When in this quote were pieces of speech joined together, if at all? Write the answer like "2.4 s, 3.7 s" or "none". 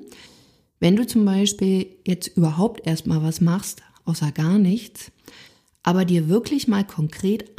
none